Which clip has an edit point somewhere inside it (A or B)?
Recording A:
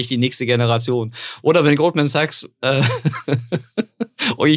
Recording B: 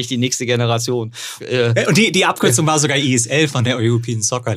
B